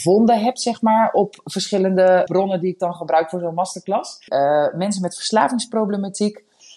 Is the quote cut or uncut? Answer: cut